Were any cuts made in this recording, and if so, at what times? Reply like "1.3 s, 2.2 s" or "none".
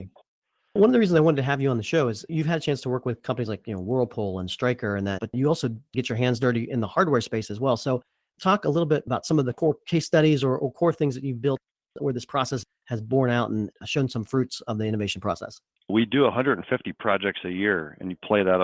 5.2 s